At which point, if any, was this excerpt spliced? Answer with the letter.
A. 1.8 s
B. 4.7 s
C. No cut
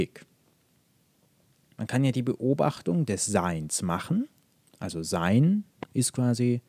A